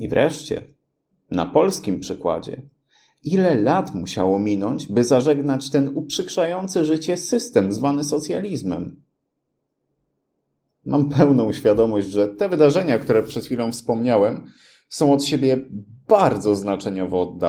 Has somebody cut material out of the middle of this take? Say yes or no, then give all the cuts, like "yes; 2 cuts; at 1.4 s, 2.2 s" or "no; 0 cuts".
no; 0 cuts